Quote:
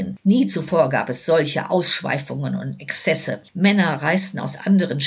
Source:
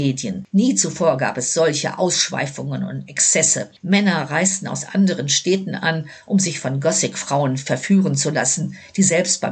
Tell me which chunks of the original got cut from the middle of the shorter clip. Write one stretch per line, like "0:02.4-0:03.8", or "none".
none